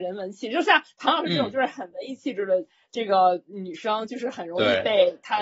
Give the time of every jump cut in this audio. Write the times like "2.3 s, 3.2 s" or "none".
none